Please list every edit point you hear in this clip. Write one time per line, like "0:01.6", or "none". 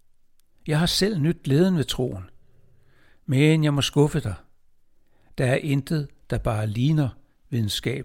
none